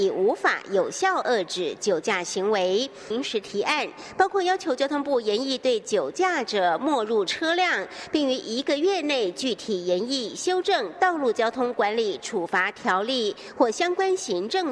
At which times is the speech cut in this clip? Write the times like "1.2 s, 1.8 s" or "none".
3.1 s

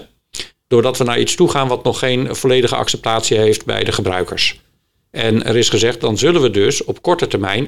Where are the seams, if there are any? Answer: none

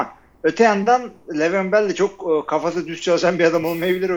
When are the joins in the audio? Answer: none

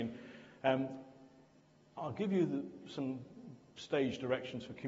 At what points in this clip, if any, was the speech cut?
none

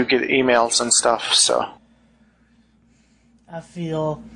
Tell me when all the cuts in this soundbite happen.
none

